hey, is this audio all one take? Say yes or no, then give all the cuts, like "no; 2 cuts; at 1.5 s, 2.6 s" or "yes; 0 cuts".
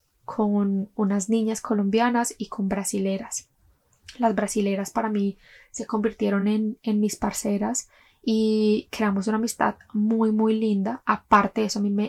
yes; 0 cuts